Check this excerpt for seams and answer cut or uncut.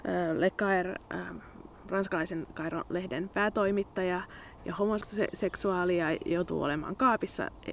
cut